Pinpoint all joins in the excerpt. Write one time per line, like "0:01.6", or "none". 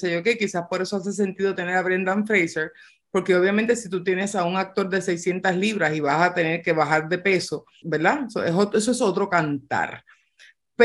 0:07.8